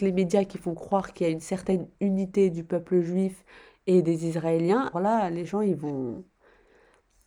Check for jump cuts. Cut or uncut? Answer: cut